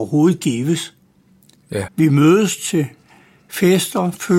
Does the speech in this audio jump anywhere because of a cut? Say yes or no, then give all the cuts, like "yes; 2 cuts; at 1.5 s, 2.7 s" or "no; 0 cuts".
yes; 1 cut; at 1.9 s